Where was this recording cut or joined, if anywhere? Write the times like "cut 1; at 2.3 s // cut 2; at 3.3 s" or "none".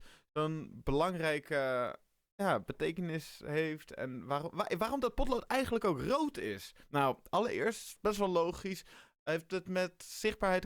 none